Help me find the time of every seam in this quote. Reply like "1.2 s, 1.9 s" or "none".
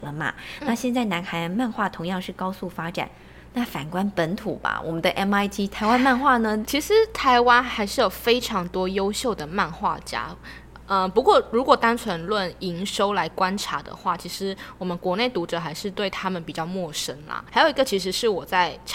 6.7 s, 17.5 s